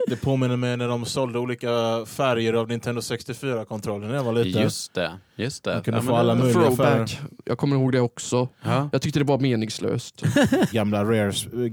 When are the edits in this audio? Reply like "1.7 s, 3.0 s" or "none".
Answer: 10.7 s